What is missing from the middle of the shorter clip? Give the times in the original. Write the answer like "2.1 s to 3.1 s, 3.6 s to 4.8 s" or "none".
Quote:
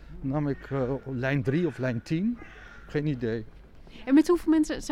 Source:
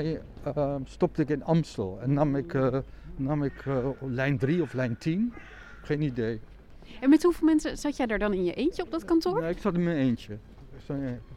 none